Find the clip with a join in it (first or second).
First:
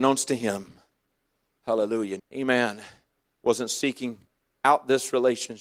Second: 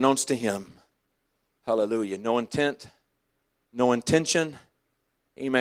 first